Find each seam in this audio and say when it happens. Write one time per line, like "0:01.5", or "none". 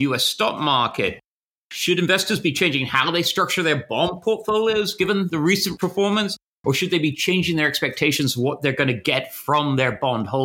none